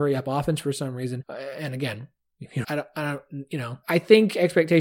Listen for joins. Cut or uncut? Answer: cut